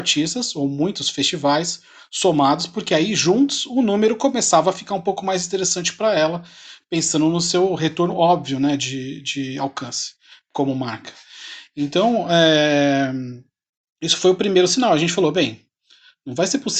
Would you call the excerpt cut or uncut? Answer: uncut